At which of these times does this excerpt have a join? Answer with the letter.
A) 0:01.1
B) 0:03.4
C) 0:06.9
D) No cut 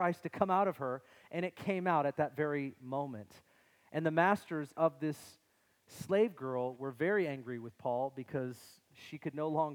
D